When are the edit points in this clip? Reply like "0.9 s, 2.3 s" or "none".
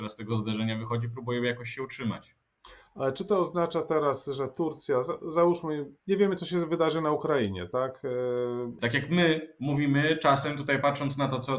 6.0 s, 8.8 s